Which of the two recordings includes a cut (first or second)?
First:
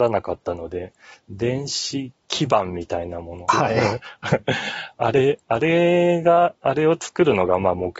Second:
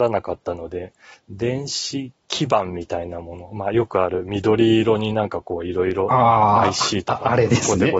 first